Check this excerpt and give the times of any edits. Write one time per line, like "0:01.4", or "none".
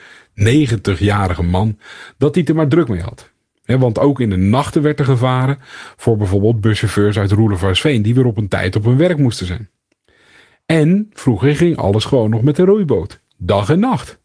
none